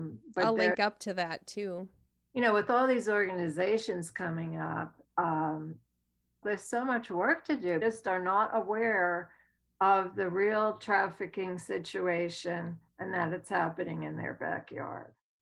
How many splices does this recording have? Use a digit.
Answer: 2